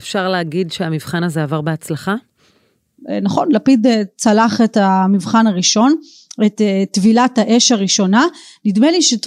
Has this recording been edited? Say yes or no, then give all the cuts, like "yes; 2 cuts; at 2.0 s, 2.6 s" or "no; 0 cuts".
no; 0 cuts